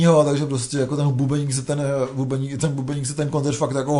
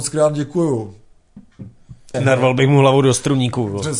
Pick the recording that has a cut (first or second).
second